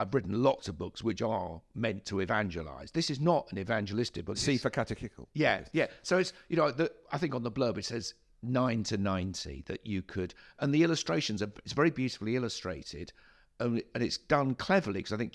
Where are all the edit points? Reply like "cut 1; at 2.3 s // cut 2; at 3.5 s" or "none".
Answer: cut 1; at 4.3 s